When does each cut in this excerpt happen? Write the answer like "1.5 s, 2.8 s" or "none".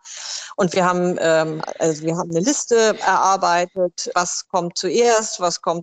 1.6 s, 4.1 s